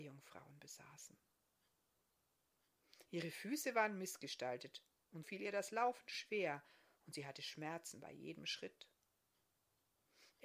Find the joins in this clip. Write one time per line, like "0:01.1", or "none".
0:05.2

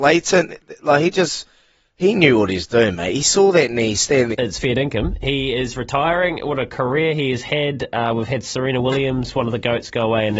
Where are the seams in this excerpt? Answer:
0:04.3

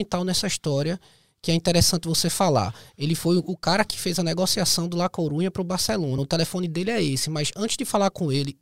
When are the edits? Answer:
none

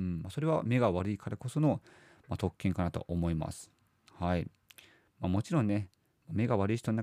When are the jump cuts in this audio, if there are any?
none

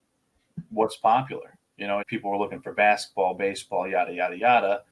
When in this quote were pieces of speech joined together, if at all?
0:02.0

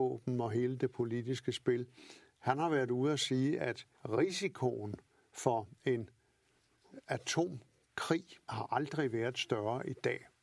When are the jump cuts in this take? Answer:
0:03.9
0:08.4

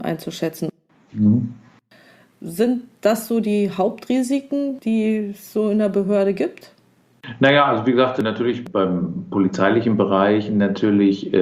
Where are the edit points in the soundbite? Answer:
none

